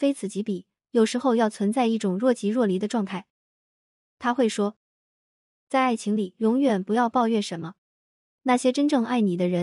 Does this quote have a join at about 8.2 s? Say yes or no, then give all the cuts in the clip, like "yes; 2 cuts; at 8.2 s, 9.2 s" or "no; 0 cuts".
yes; 1 cut; at 8.2 s